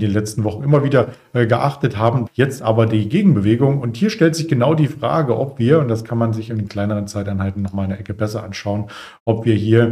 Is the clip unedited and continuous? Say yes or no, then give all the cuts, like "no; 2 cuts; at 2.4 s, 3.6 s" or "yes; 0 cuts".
no; 1 cut; at 2.3 s